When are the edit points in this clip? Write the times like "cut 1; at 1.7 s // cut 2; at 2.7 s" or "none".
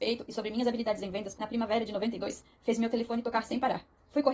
cut 1; at 1.4 s